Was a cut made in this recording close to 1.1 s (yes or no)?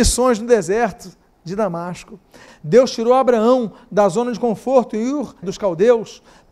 no